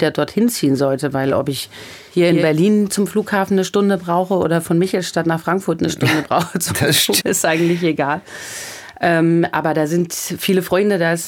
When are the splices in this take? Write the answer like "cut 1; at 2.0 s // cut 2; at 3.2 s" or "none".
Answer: cut 1; at 7.2 s